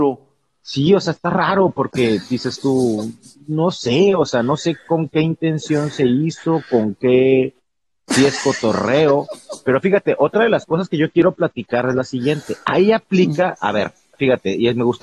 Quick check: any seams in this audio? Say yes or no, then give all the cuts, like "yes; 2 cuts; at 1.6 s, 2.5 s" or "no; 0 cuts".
no; 0 cuts